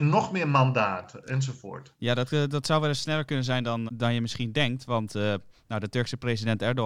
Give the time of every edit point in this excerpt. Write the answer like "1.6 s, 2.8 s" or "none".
3.9 s

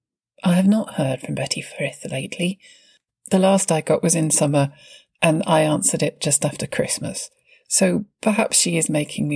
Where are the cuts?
none

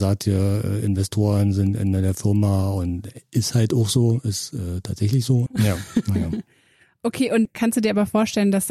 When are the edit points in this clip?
5.5 s

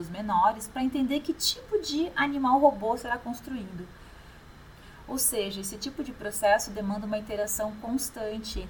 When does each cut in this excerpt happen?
none

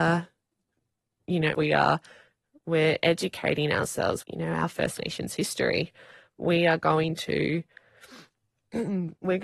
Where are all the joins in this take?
1.5 s, 4.2 s

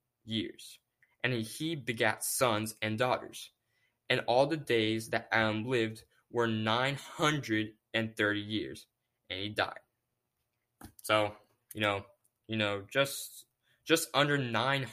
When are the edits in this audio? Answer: 12.4 s

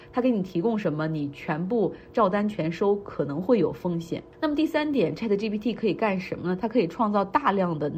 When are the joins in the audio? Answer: 4.3 s

